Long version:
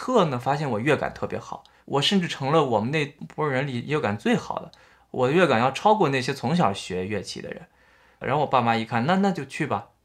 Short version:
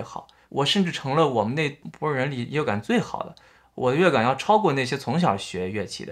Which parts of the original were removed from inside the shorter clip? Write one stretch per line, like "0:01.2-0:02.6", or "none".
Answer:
none